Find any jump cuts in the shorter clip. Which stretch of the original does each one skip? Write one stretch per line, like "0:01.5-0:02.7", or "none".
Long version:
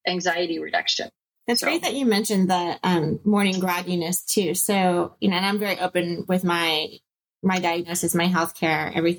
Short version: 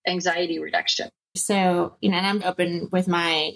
0:01.4-0:04.5
0:05.6-0:05.8